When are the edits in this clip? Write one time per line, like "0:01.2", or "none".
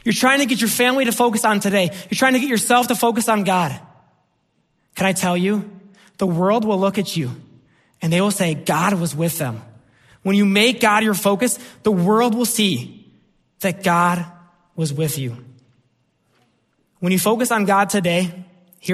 none